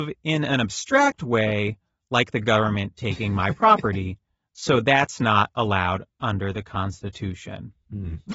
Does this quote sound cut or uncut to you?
uncut